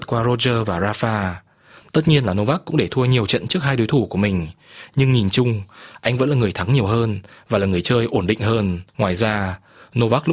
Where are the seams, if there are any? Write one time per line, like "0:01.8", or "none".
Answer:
0:01.9
0:08.9

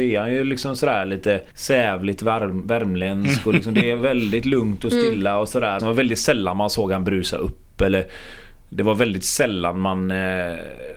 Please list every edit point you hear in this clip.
0:01.5
0:05.8

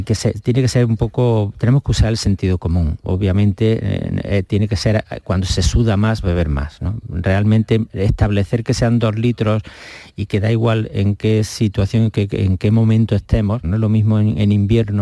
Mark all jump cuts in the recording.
0:06.2
0:13.6

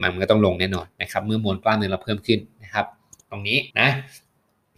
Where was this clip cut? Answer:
0:03.7

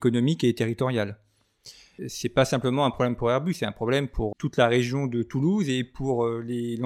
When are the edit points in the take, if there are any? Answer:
0:02.0
0:04.3

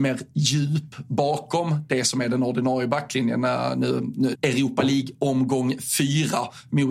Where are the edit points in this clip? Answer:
0:04.3

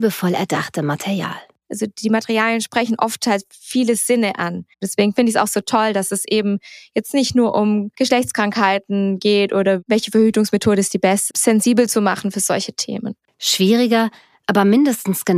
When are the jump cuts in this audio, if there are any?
0:04.7
0:11.3
0:13.3

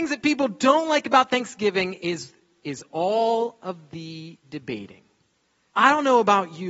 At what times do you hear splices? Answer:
0:05.7

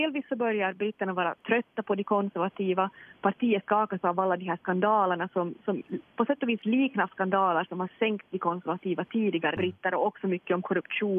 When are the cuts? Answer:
0:09.6

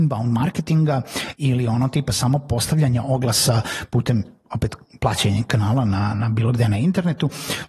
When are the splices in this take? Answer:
0:06.1

